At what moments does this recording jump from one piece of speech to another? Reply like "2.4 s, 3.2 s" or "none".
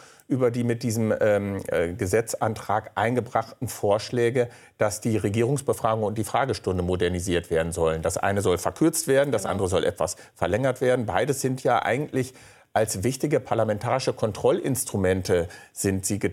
none